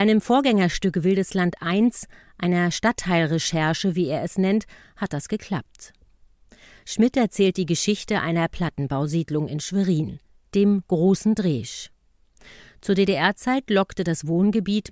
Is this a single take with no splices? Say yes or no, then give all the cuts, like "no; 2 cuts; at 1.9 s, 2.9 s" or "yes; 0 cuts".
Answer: yes; 0 cuts